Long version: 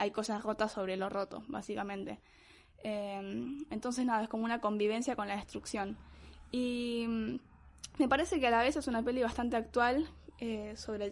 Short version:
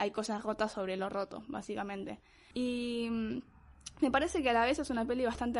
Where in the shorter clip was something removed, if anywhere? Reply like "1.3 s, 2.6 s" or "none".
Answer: 2.5 s